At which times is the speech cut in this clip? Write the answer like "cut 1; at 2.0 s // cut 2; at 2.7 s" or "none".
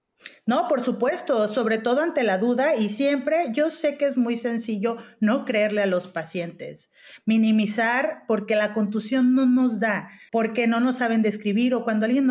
cut 1; at 10.3 s